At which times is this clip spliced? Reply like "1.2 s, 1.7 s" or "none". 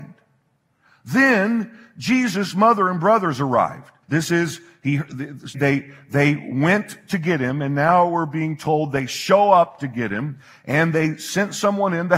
4.0 s, 5.5 s